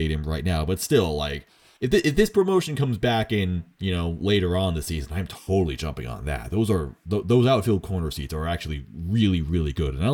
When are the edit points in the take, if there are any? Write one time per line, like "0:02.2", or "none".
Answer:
none